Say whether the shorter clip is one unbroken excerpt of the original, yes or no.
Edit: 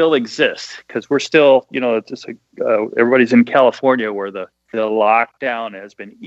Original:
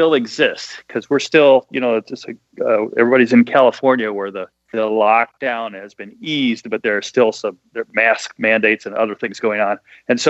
yes